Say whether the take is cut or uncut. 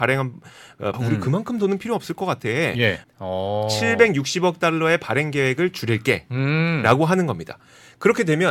cut